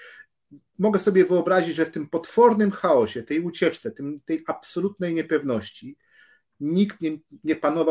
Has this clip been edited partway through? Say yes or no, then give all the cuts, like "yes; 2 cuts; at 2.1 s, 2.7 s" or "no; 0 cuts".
no; 0 cuts